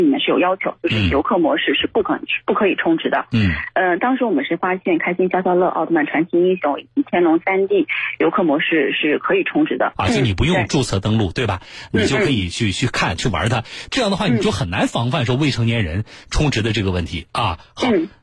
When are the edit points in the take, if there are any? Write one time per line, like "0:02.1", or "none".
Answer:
0:09.9
0:13.9